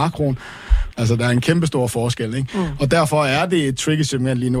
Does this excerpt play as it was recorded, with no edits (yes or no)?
no